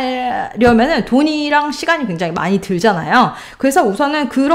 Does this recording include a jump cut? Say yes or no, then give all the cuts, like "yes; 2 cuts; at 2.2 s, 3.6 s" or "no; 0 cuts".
no; 0 cuts